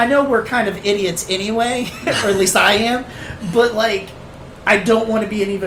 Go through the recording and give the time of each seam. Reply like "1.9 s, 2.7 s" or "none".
none